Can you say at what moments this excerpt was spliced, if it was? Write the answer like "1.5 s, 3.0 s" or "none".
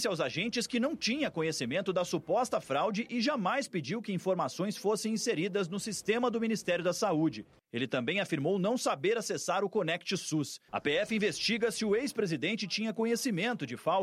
10.7 s